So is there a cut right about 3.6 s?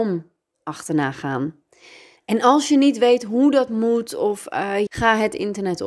no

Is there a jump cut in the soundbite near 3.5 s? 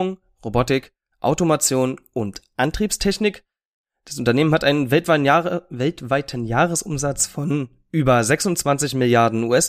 no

